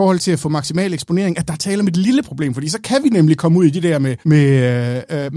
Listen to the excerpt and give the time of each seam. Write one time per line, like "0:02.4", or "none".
0:04.2